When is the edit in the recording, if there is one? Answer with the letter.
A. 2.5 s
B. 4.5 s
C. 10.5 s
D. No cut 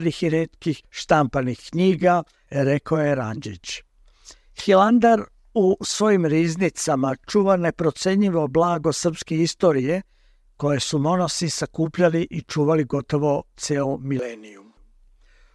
A